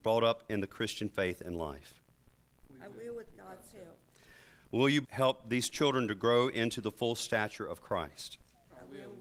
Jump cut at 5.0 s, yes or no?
yes